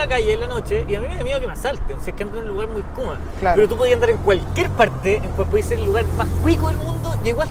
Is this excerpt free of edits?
yes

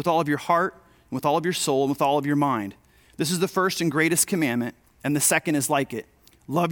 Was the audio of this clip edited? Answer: no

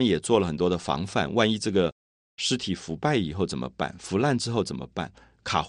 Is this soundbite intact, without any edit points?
yes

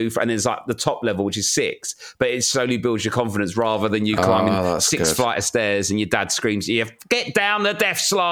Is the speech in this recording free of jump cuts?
yes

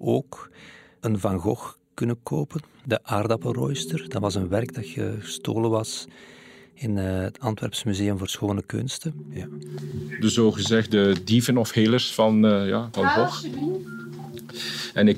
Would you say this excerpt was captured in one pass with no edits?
no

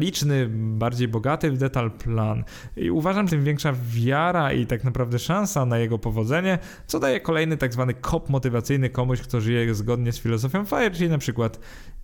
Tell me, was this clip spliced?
yes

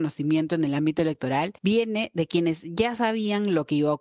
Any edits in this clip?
yes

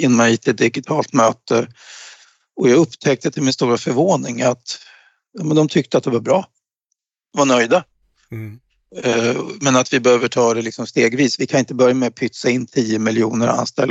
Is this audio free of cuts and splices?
yes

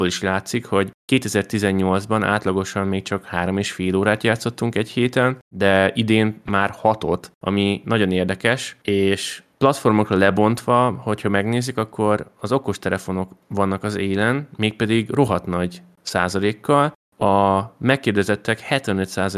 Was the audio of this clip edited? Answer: no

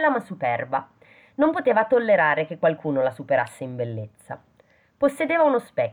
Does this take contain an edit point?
no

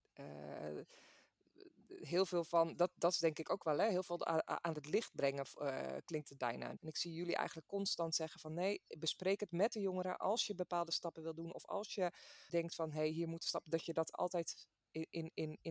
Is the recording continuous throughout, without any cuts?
no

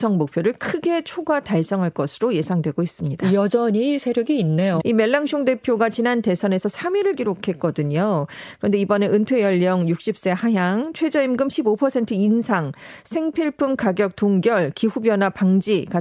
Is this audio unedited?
no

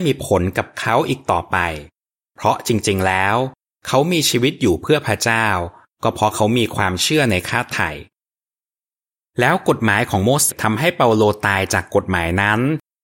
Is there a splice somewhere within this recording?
yes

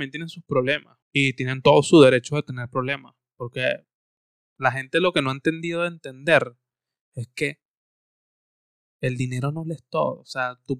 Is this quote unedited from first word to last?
no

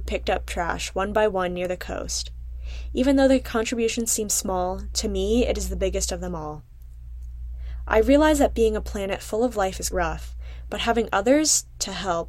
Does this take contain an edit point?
yes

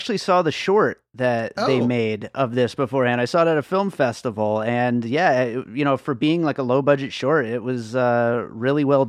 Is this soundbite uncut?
yes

